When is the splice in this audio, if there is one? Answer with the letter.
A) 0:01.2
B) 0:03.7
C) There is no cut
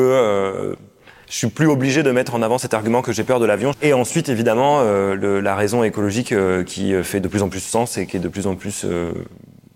B